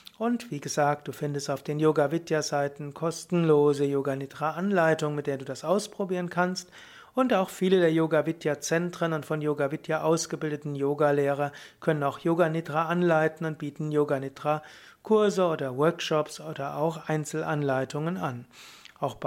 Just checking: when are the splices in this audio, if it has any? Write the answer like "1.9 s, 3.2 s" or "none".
none